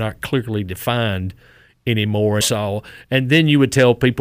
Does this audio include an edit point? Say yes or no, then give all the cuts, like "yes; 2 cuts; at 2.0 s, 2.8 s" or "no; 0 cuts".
yes; 1 cut; at 2.4 s